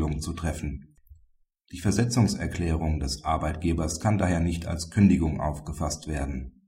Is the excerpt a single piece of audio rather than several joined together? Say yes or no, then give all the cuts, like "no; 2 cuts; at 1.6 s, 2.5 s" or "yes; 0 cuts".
no; 1 cut; at 1.7 s